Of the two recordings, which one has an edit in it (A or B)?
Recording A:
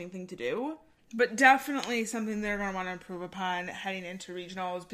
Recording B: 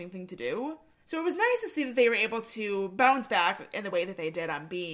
A